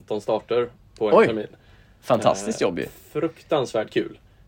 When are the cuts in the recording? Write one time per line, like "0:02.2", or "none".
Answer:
none